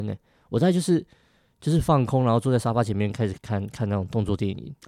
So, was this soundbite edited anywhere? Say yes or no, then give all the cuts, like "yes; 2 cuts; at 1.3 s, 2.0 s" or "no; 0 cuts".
yes; 1 cut; at 3.3 s